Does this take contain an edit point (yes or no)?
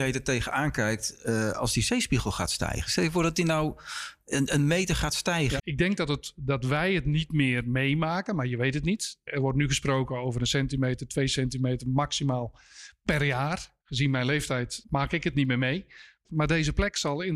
yes